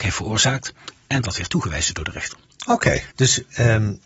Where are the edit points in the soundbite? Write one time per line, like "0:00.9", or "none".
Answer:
0:03.1

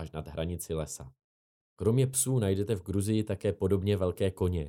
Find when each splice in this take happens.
0:01.7

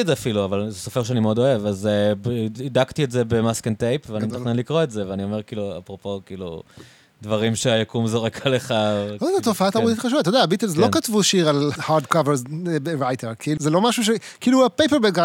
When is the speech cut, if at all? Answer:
0:11.8
0:13.6

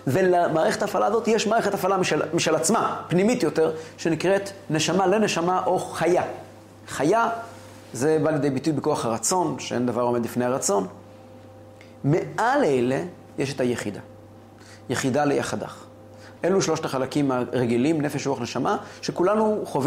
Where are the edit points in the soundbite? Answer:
0:16.4

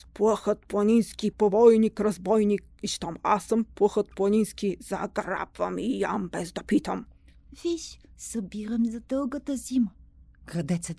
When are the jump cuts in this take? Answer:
0:01.3
0:08.1

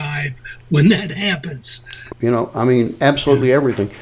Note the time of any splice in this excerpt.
0:02.1

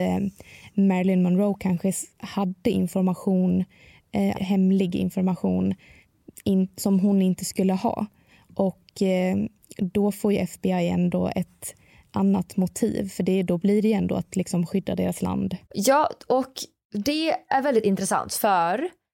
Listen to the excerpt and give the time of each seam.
0:04.3
0:15.6

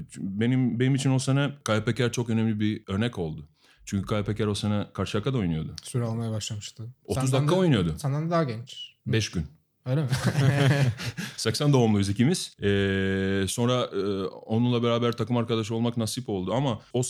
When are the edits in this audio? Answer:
none

